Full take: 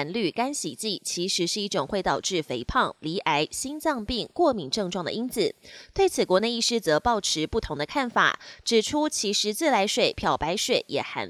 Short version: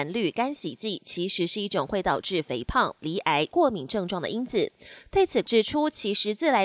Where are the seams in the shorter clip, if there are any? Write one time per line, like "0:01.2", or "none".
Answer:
0:03.5
0:05.4